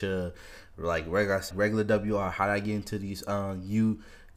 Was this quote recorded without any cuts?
no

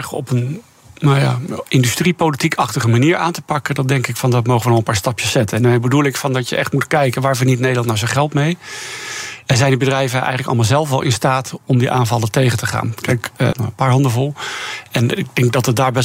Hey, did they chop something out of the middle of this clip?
yes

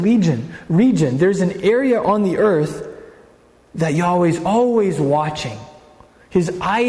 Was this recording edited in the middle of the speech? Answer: no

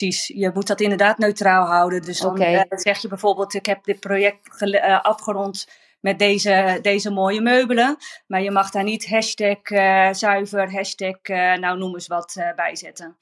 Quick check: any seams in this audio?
no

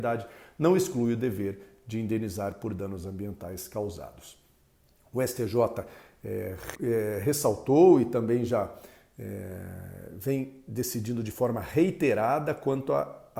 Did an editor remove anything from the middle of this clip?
yes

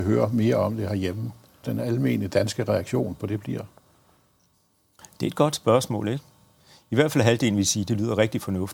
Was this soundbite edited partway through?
yes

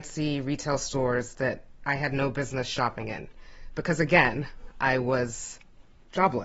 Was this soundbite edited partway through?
no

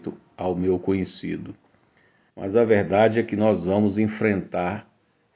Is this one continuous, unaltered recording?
no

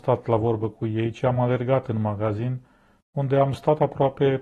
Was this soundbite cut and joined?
no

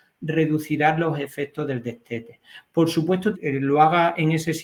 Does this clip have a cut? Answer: yes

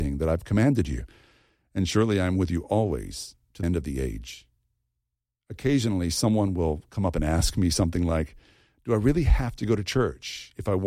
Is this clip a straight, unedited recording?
no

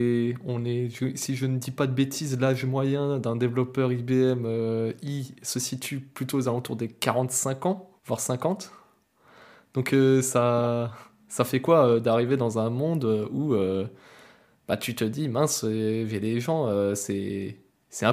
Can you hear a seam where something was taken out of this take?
yes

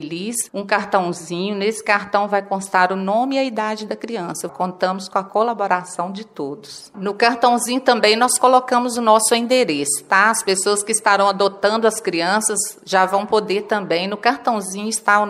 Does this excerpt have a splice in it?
yes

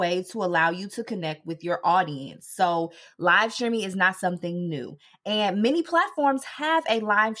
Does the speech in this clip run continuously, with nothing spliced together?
yes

